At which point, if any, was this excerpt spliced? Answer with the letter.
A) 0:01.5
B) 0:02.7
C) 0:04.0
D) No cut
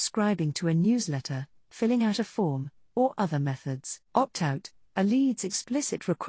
C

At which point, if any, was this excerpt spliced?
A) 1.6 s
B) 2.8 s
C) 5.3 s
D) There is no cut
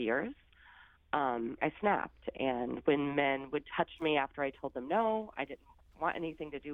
A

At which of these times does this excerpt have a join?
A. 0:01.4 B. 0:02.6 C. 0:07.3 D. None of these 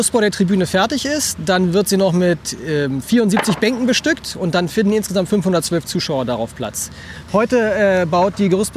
C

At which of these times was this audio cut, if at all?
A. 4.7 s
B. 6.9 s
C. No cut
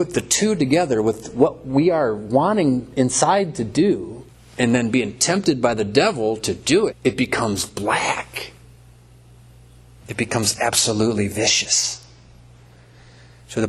B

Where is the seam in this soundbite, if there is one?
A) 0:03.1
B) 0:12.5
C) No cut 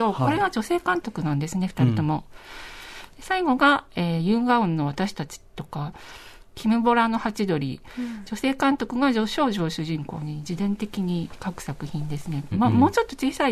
B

